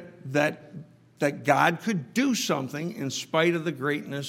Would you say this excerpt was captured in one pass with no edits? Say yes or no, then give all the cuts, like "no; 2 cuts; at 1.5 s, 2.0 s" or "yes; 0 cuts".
yes; 0 cuts